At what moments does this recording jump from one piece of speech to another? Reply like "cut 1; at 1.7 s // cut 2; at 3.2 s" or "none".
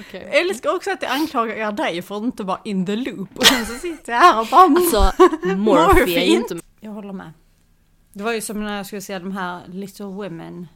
cut 1; at 6.6 s